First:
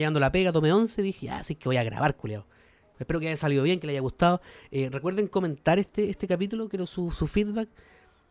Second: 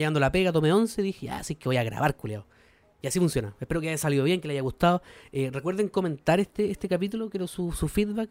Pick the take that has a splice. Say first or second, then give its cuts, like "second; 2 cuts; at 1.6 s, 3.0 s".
first; 1 cut; at 2.9 s